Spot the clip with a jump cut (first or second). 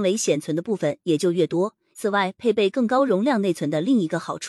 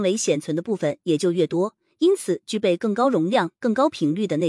first